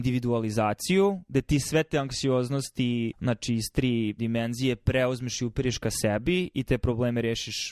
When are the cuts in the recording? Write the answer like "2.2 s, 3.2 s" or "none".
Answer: 3.1 s, 4.2 s